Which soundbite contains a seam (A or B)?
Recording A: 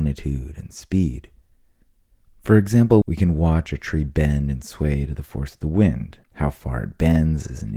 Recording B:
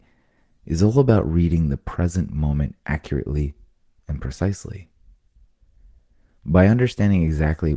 A